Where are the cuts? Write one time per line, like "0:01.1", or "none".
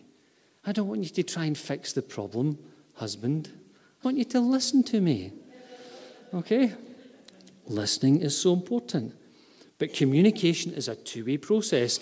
0:04.0